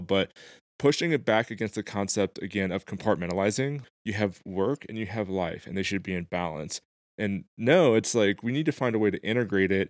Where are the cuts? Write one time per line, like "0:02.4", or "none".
none